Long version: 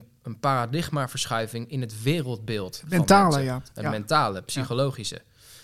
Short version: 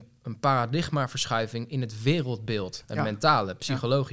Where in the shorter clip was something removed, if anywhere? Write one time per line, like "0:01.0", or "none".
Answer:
0:02.8